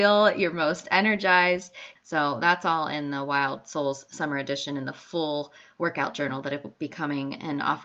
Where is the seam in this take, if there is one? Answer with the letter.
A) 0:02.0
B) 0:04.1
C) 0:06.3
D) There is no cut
A